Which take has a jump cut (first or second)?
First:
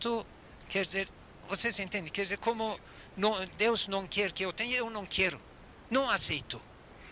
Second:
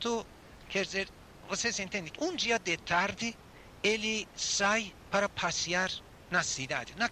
second